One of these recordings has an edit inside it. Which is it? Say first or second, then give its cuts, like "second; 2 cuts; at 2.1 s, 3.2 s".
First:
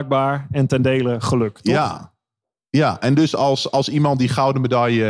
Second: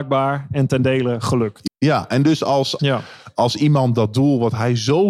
second; 2 cuts; at 1.7 s, 2.8 s